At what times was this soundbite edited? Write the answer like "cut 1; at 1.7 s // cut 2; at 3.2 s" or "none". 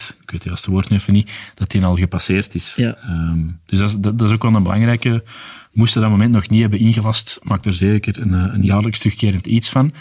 none